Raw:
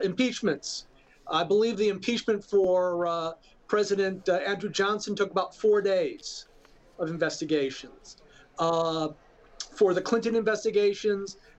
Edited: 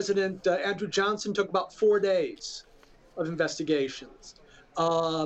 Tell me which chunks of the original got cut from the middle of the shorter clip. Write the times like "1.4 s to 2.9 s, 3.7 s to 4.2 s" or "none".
none